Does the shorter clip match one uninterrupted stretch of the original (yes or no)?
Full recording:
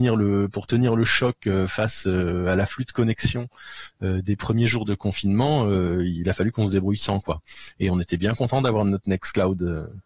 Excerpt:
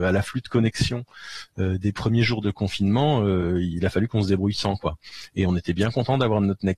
yes